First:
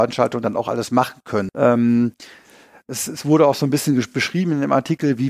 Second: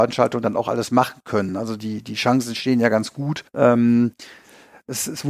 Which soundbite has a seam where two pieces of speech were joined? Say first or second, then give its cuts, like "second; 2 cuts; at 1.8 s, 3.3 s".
first; 1 cut; at 1.5 s